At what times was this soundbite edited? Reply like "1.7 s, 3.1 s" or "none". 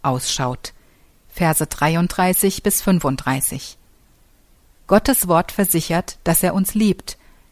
4.6 s